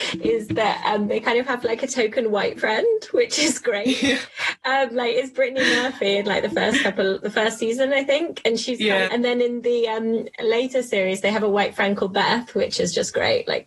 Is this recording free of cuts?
no; 1 cut; at 9.1 s

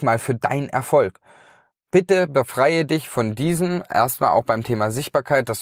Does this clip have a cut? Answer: no; 0 cuts

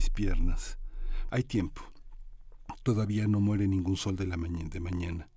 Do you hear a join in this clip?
yes; 1 cut; at 1.3 s

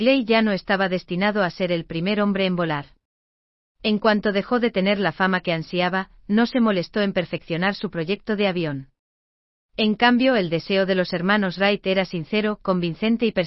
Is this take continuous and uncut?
yes; 0 cuts

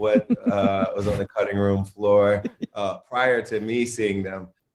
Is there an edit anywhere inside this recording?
no; 0 cuts

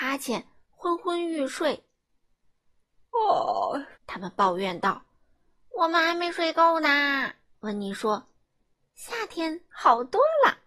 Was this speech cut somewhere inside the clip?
yes; 2 cuts; at 4.0 s, 7.5 s

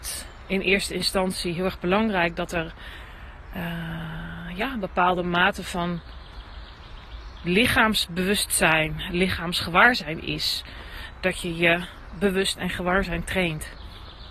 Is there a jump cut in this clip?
no; 0 cuts

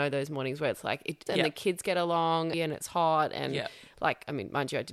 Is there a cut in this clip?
yes; 2 cuts; at 1.3 s, 2.5 s

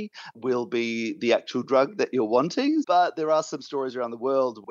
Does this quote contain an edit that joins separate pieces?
yes; 1 cut; at 2.8 s

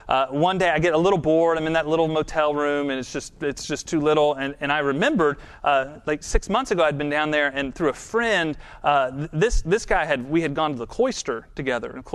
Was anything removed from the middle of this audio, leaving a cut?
no; 0 cuts

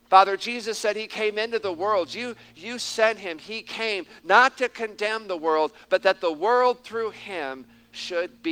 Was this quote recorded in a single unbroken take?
yes; 0 cuts

